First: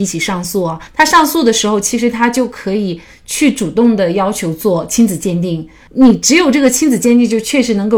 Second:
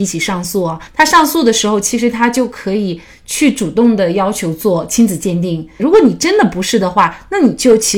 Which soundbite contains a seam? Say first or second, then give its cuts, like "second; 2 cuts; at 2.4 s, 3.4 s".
second; 1 cut; at 5.8 s